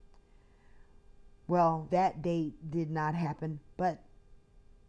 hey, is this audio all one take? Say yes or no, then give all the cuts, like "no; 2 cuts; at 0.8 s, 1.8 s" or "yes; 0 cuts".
no; 1 cut; at 1.9 s